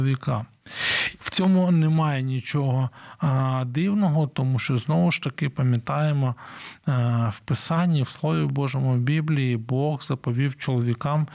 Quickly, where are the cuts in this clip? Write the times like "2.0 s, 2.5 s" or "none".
1.2 s